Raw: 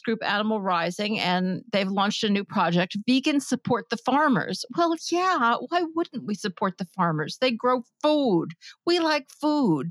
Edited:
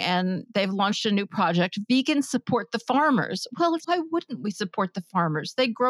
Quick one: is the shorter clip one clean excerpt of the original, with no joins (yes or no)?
no